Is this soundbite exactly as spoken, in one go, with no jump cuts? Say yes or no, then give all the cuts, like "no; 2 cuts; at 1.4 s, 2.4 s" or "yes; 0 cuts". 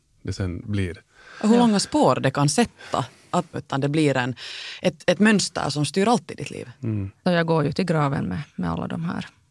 no; 2 cuts; at 3.5 s, 7.3 s